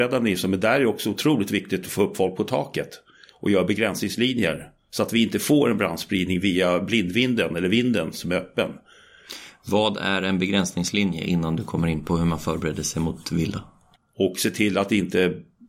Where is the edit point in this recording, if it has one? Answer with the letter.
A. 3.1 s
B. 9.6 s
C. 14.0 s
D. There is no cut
C